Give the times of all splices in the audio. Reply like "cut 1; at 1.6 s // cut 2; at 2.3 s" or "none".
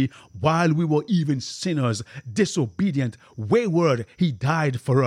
none